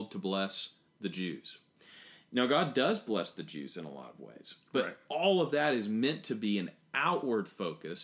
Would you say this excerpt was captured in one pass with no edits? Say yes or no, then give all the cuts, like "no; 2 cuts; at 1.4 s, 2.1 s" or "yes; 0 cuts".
yes; 0 cuts